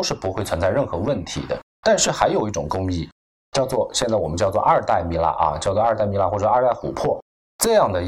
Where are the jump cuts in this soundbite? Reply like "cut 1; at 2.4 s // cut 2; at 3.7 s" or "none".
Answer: cut 1; at 1.7 s

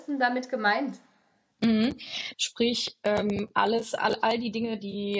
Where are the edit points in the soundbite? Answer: cut 1; at 2.3 s

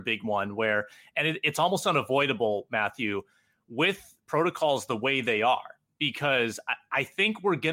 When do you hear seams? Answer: none

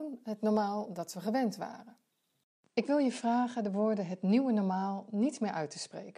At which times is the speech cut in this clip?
cut 1; at 2.7 s

